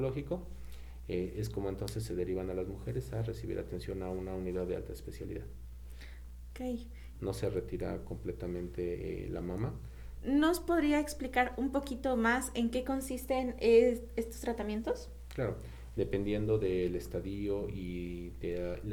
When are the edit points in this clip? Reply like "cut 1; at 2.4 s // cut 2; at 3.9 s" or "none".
cut 1; at 7.1 s // cut 2; at 10.2 s // cut 3; at 15.9 s